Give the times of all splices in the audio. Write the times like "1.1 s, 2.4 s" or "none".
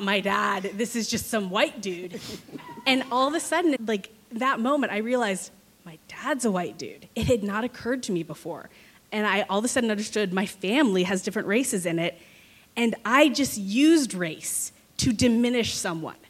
3.8 s